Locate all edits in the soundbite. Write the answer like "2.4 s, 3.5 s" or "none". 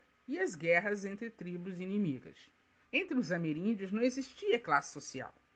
2.8 s